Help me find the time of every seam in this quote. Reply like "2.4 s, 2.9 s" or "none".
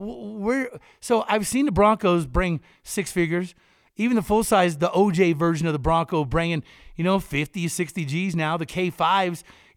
none